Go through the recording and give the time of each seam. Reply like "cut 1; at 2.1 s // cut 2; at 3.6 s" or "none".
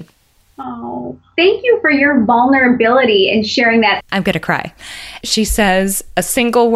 cut 1; at 4.0 s // cut 2; at 5.2 s